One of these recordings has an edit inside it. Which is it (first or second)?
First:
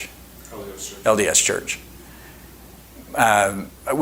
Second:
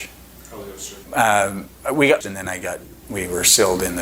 second